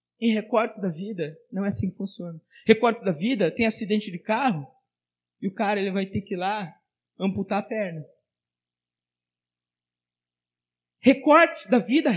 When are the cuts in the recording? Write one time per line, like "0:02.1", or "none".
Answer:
none